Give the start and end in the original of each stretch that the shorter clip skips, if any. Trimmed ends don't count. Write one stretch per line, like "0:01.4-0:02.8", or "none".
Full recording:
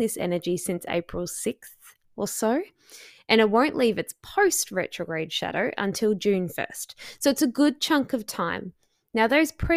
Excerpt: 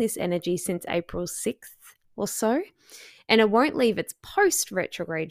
none